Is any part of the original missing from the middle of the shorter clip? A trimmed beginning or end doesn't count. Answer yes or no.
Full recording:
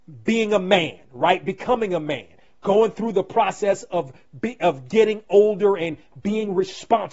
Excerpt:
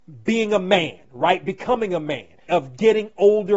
yes